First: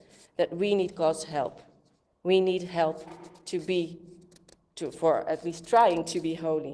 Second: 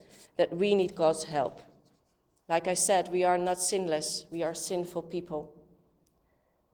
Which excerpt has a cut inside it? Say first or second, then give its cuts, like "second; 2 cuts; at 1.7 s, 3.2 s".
first; 1 cut; at 2.0 s